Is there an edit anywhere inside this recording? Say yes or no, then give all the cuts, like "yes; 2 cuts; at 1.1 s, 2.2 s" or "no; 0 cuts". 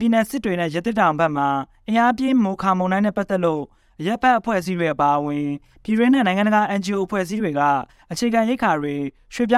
no; 0 cuts